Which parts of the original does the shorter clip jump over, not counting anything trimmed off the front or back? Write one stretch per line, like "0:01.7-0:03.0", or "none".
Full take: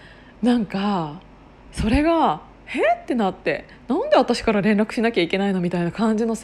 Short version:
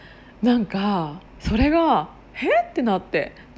0:01.3-0:01.6